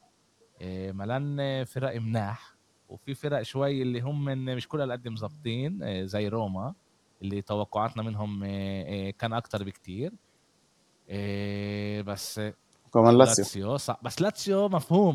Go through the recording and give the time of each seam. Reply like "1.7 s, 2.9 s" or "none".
none